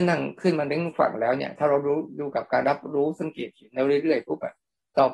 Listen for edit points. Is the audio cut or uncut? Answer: cut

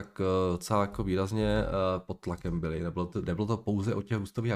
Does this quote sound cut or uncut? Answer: uncut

